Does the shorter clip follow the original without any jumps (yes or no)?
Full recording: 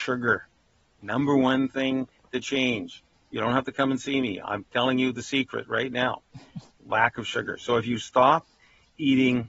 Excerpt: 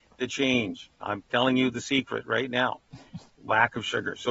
no